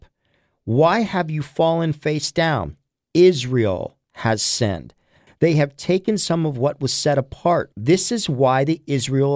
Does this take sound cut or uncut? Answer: cut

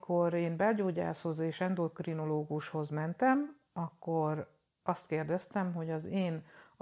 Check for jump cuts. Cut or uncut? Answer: uncut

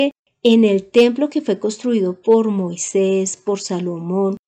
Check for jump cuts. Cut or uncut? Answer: uncut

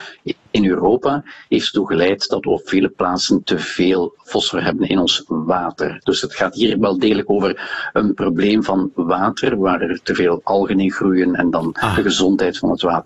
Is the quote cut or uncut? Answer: uncut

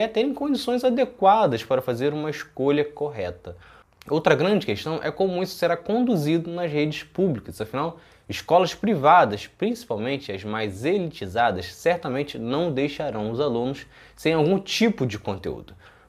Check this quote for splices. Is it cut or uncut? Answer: uncut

